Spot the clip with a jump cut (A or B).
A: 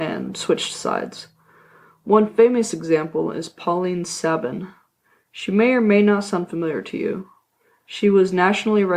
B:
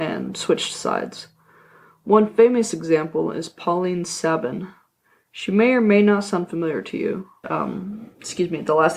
B